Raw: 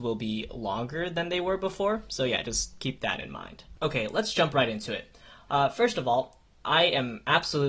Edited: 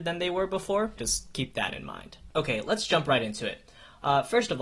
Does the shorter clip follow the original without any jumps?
no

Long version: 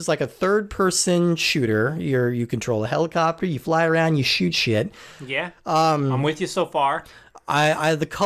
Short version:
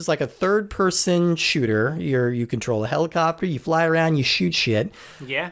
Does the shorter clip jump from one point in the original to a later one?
no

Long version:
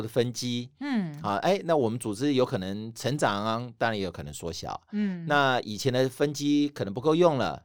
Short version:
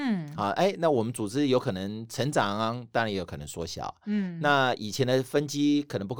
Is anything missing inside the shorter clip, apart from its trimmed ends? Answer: no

